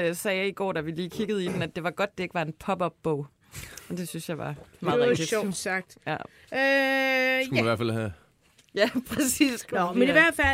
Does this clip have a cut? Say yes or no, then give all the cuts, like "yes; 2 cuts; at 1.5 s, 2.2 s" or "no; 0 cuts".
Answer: no; 0 cuts